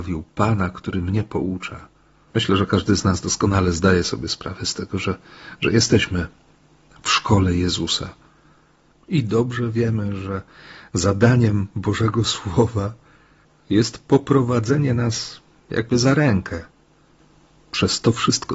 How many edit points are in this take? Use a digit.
1